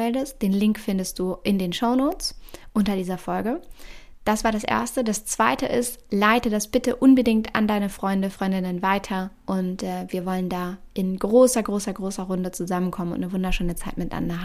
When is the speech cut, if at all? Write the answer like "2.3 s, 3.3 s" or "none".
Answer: none